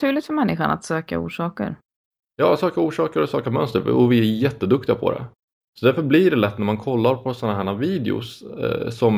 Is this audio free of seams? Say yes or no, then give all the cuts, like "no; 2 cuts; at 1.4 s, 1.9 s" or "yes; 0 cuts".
yes; 0 cuts